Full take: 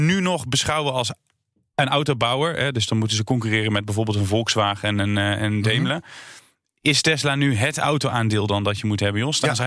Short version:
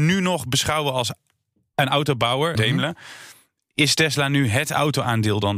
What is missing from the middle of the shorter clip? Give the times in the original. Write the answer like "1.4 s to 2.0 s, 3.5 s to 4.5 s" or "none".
2.5 s to 5.6 s